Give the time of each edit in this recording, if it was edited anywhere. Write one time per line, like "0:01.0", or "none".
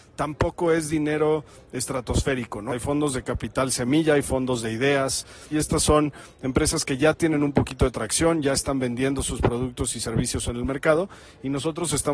0:02.7
0:05.5